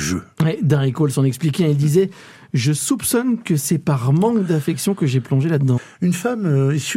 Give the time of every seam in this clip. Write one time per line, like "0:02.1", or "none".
0:05.8